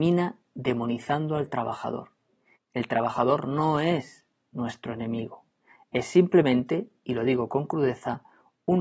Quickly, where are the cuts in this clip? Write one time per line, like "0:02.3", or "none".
0:02.6